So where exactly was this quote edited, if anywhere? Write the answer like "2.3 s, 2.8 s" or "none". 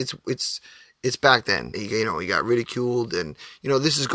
1.7 s